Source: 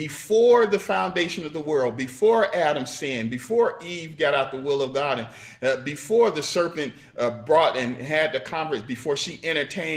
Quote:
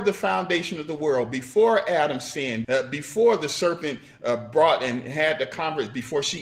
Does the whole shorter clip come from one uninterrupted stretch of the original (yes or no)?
no